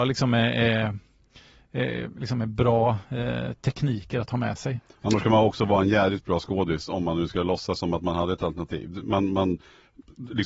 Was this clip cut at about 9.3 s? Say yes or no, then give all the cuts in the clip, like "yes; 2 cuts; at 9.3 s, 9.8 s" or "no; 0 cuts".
no; 0 cuts